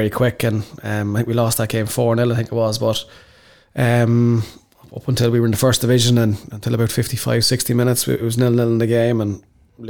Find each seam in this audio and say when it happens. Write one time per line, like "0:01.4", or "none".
none